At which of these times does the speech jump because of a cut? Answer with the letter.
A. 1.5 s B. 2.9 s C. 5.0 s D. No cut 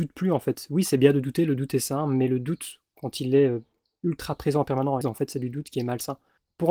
C